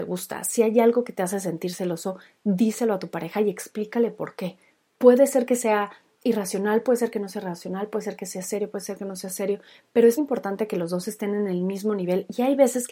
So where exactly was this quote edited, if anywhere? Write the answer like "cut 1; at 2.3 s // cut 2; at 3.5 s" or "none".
cut 1; at 4.9 s // cut 2; at 10.2 s